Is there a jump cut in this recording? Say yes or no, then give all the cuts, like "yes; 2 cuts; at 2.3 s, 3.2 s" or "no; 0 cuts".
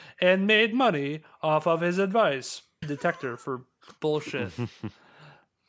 yes; 1 cut; at 2.8 s